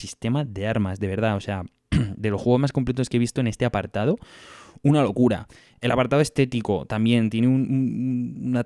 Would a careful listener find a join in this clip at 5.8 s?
no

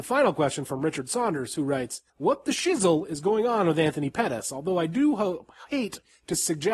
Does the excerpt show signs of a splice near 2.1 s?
yes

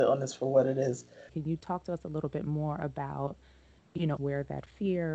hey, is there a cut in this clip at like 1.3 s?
yes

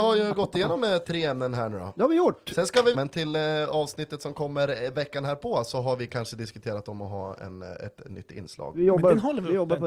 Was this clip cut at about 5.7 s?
no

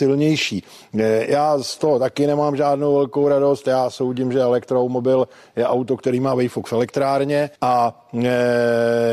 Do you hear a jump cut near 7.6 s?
yes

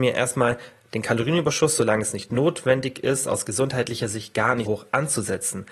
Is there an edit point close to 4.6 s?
yes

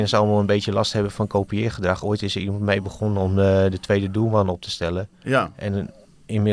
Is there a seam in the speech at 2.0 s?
no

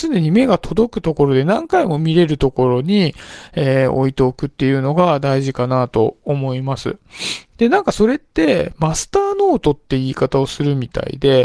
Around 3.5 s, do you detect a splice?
no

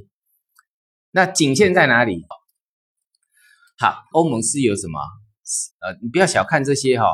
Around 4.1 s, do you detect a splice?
yes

